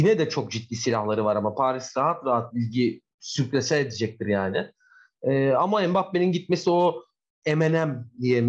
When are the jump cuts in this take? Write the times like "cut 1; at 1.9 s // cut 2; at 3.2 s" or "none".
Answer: none